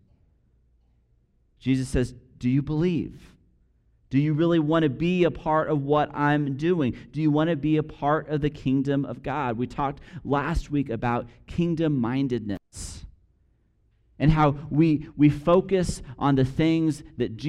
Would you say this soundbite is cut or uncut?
uncut